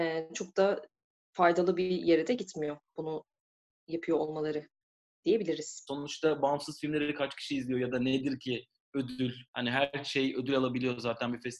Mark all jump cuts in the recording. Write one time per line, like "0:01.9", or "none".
0:05.9
0:09.5